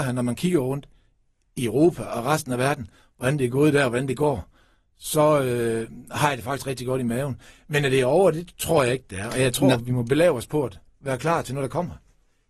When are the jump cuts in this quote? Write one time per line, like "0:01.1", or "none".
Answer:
none